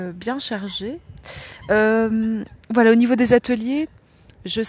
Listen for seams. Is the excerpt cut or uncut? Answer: uncut